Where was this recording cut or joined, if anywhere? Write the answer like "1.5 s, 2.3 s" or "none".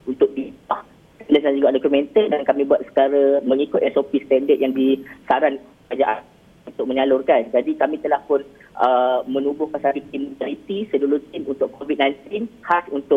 none